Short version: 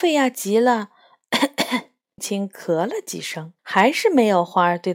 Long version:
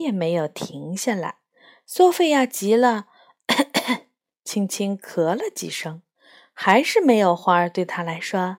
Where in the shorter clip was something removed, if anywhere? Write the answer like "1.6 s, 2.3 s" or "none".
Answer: 2.2 s, 3.6 s